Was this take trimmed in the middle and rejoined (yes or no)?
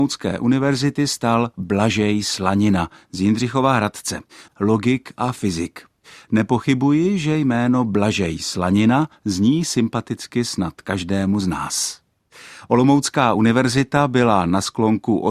yes